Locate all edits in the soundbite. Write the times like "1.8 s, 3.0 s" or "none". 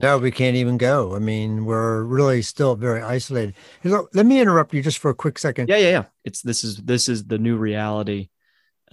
6.2 s